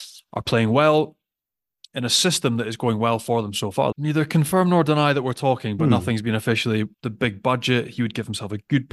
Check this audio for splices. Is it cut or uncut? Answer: cut